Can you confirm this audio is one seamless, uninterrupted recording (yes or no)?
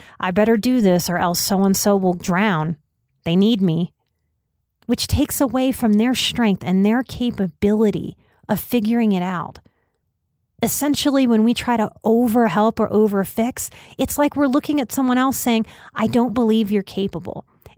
no